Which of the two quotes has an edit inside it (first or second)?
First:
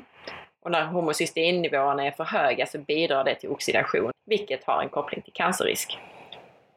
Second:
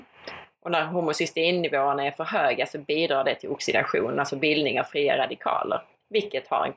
first